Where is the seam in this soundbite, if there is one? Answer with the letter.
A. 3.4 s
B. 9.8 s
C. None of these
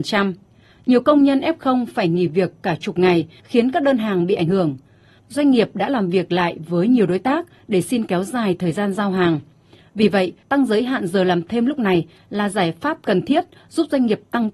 A